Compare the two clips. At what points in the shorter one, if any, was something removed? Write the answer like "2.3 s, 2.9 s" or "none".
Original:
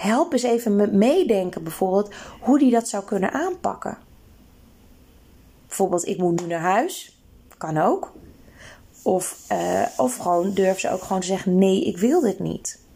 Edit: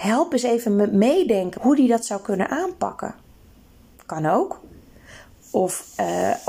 1.6 s, 3.9 s